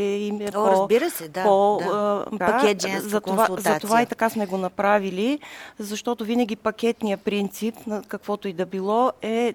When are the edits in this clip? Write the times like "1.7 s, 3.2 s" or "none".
2.4 s